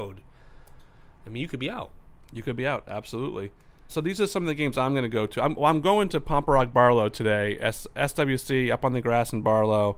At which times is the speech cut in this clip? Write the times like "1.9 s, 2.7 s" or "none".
3.9 s

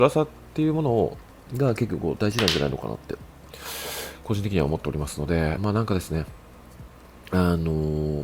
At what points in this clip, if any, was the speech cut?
5.6 s

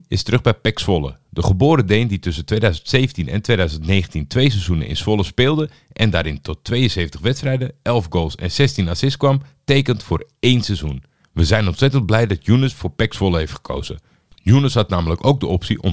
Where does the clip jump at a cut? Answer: 11.2 s

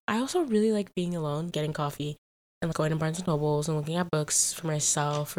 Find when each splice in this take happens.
1.5 s, 2.7 s

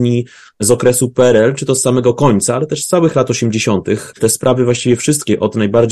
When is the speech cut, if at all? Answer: none

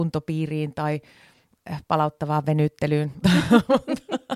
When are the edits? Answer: 3.2 s

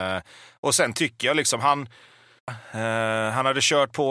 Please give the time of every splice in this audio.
2.5 s

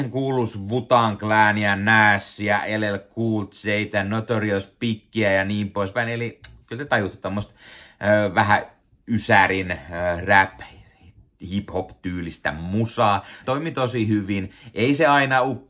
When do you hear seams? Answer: 13.4 s

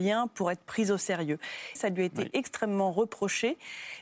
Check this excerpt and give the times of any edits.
1.7 s

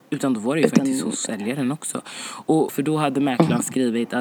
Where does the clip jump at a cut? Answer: 2.7 s

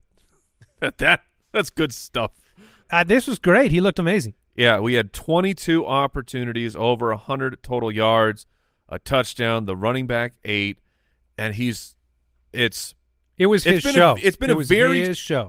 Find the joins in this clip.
2.8 s

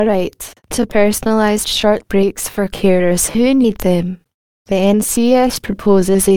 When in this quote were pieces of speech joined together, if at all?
none

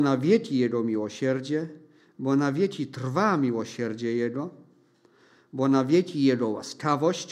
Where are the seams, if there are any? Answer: none

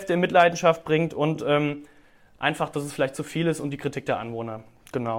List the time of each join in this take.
none

